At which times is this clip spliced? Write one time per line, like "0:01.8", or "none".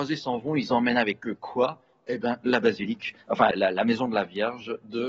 0:03.5

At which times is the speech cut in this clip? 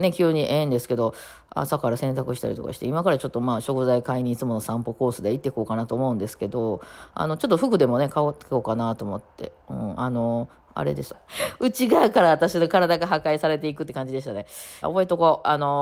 0:11.1
0:14.8

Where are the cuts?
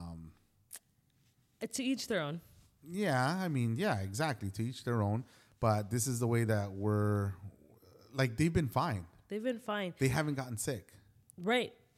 none

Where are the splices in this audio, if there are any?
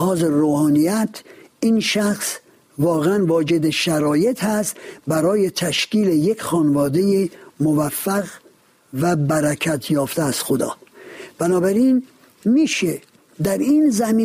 none

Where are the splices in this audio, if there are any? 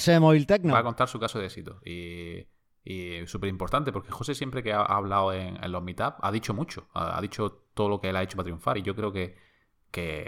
none

